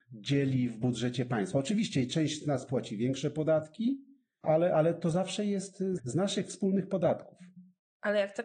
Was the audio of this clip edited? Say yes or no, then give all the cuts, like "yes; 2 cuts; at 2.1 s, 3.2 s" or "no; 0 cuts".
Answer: yes; 2 cuts; at 4.4 s, 6.0 s